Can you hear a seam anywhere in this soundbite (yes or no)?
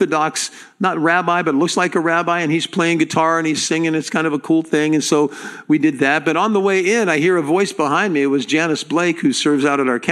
no